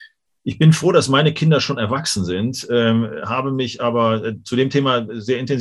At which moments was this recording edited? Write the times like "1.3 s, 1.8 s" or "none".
none